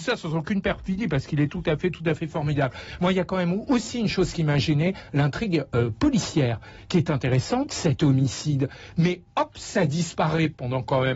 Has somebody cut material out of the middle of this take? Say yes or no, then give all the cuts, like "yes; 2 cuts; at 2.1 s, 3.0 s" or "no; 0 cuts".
no; 0 cuts